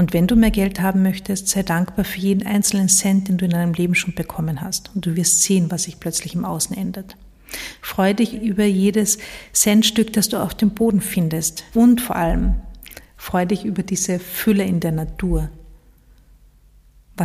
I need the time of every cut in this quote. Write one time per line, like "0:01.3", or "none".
0:08.3
0:11.7